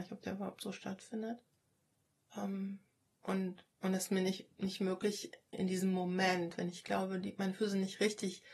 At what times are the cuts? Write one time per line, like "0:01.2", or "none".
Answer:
0:05.5